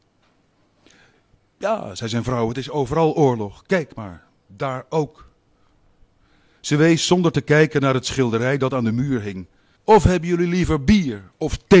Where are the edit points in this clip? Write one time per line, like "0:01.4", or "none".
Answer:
0:09.8